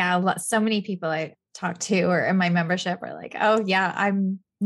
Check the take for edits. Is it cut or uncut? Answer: uncut